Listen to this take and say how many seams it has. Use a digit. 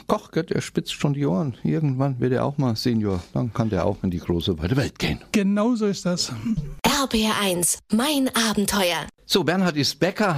0